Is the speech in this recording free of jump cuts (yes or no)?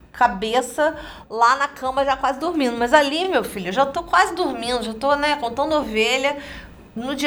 yes